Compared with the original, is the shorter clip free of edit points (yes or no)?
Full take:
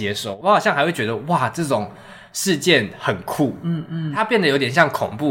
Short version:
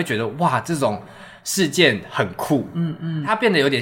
yes